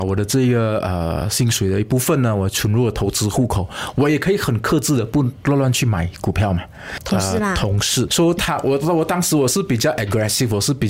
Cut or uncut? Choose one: cut